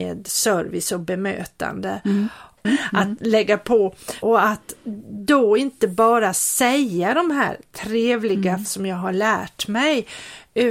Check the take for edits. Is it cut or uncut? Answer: cut